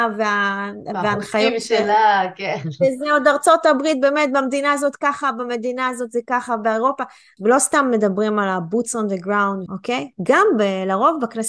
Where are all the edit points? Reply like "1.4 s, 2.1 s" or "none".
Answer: 7.4 s, 9.7 s